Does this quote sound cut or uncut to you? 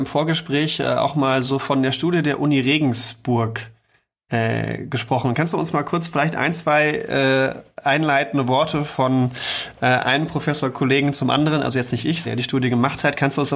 cut